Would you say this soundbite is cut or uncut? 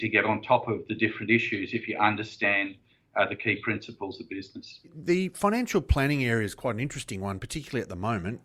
uncut